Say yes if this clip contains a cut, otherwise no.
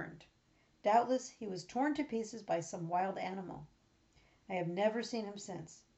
no